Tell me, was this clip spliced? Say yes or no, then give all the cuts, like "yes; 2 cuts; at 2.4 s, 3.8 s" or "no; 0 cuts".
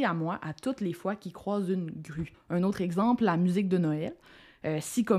yes; 1 cut; at 2.3 s